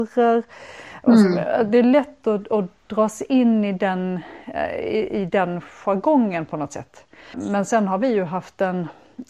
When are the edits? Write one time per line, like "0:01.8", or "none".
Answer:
0:07.3